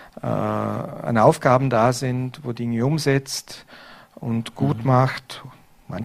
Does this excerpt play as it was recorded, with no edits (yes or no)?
yes